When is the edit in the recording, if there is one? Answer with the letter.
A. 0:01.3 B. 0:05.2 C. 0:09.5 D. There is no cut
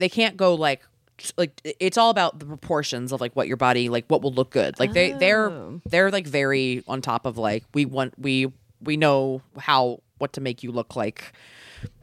C